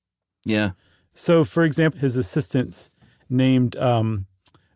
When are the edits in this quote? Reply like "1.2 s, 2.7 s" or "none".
1.9 s